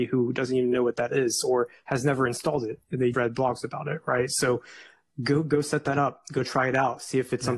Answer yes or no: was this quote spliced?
yes